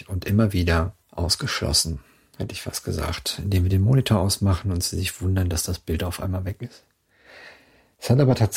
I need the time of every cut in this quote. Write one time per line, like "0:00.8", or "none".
0:01.0